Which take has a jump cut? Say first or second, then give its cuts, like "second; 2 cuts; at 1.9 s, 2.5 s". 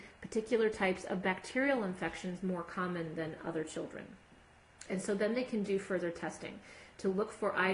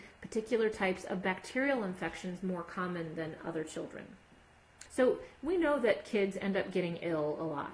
second; 1 cut; at 4.9 s